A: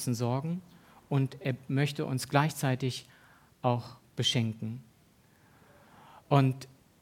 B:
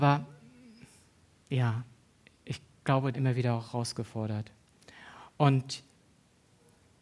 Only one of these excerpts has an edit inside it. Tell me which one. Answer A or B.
B